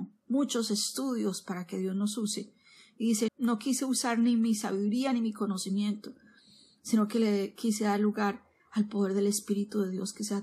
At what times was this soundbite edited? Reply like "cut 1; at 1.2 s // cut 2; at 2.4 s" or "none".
cut 1; at 3.3 s

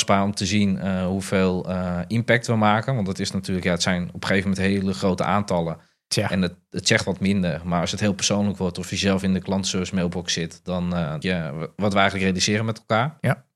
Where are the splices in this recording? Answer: cut 1; at 11.2 s

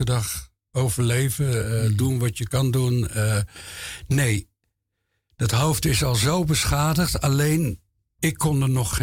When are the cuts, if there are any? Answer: none

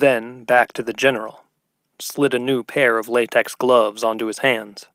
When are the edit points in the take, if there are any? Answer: cut 1; at 1.9 s

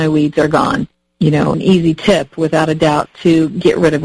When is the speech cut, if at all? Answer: cut 1; at 1.5 s

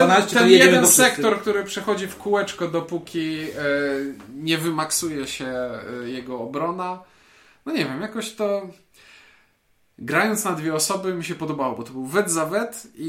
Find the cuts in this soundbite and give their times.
none

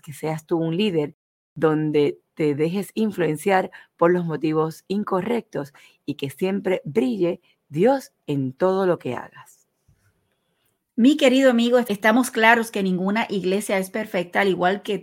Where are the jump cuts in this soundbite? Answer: none

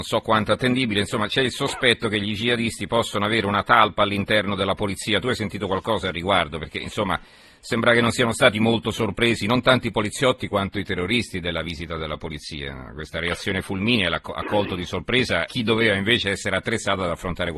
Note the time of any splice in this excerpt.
cut 1; at 15.5 s

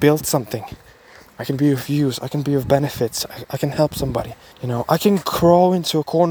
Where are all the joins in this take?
cut 1; at 4.5 s

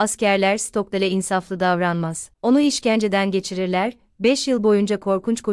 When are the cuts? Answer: none

